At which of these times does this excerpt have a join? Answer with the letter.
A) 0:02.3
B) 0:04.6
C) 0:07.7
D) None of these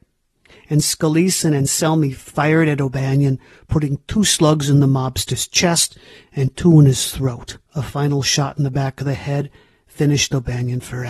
C